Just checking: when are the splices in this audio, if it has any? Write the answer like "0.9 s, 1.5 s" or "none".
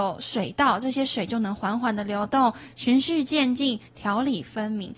none